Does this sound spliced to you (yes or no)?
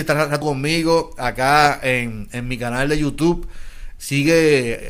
yes